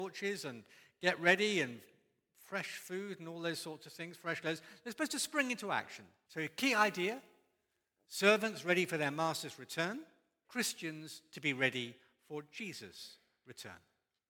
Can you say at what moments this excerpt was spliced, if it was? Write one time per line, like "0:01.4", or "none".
0:06.3
0:10.4

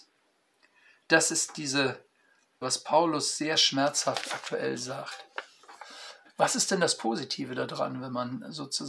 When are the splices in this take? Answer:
0:02.6
0:06.2

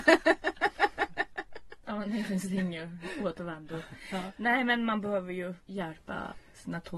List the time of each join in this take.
0:05.6

